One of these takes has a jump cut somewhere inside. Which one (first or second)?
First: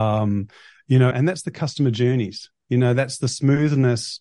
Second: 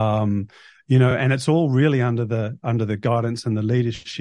first